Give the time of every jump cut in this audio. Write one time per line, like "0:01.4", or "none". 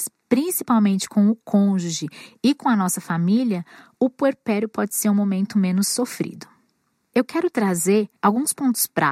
0:08.2